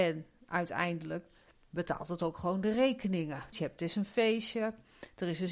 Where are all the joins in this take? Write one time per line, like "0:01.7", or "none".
0:03.5